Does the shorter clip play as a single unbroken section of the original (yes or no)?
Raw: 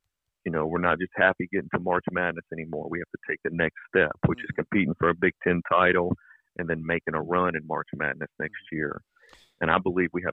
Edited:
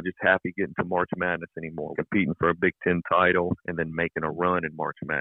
no